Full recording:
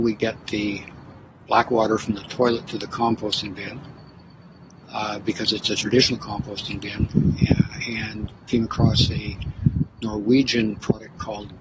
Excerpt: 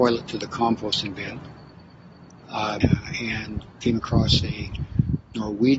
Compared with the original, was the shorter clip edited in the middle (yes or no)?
yes